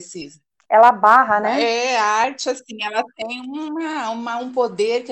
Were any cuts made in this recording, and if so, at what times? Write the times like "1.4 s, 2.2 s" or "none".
none